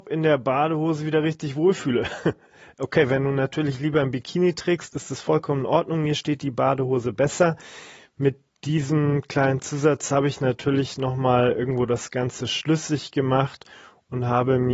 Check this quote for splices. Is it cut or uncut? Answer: uncut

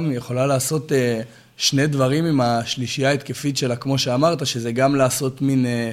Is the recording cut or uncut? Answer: uncut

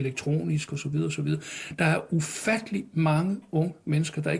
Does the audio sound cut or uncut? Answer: uncut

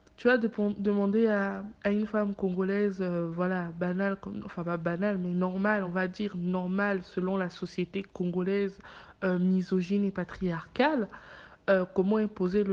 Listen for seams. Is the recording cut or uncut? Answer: uncut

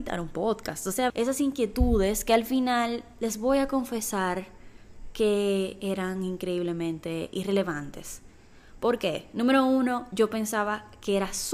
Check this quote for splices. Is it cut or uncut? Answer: cut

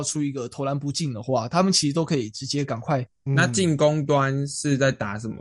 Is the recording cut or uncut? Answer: cut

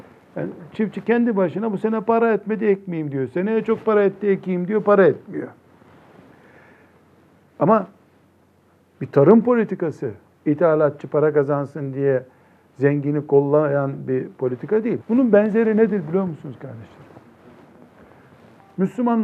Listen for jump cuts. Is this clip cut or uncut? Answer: cut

